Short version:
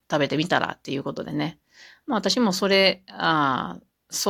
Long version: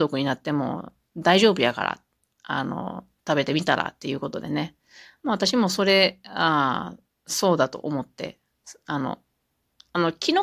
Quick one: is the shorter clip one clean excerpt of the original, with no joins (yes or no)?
yes